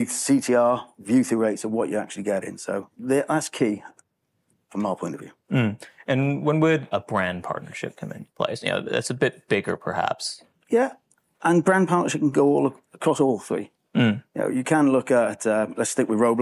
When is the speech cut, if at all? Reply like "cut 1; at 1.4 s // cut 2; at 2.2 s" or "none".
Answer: cut 1; at 6.9 s